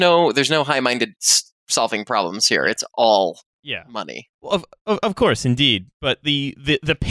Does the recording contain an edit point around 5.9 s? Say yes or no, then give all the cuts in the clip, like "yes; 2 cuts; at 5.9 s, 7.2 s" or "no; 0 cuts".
no; 1 cut; at 4.3 s